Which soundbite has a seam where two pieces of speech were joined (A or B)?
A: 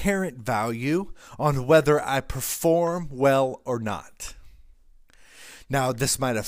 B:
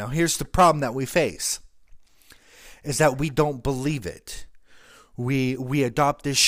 B